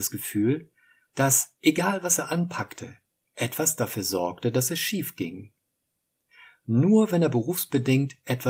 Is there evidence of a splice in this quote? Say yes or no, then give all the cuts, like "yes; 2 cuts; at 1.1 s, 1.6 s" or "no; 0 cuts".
no; 0 cuts